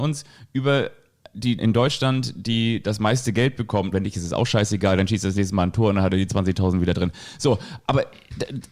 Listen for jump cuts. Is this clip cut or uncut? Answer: cut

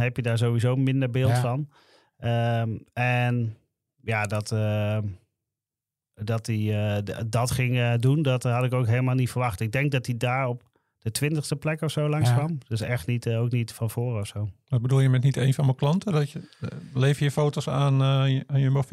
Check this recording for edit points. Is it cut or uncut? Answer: uncut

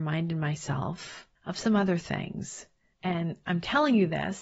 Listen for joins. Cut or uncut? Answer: cut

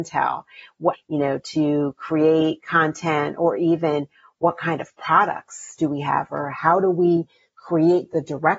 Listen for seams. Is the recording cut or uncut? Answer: cut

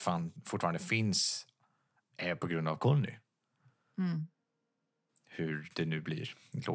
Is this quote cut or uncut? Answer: uncut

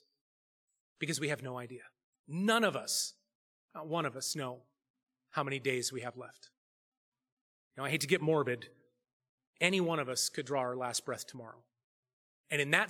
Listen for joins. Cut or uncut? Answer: cut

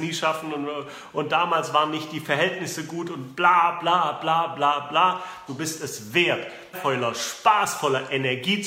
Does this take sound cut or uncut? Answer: cut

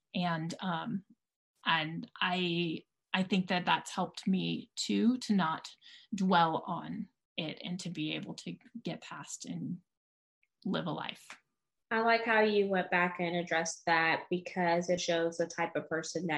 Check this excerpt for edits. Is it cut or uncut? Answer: cut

